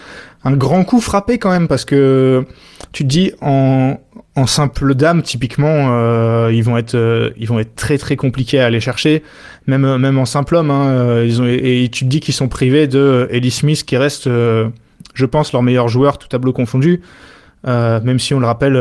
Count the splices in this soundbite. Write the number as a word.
one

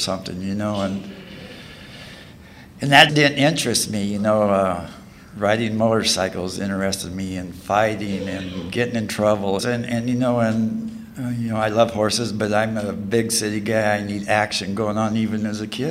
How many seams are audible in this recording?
two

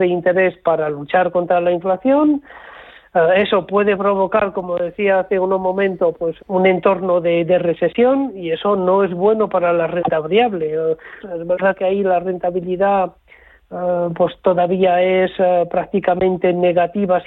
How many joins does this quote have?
two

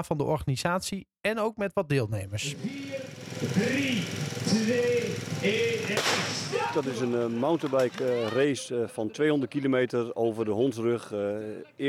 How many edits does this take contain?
zero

